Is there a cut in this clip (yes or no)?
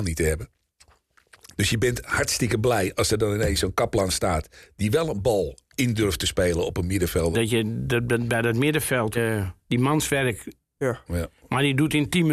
yes